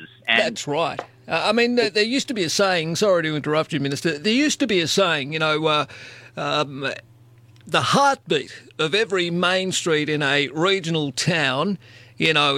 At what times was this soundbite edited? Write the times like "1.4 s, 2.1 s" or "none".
none